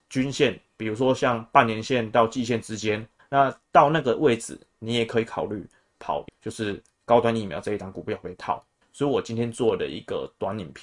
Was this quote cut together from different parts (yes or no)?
yes